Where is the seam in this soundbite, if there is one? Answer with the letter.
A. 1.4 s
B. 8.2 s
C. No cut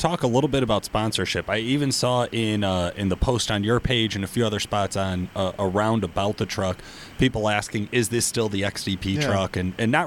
C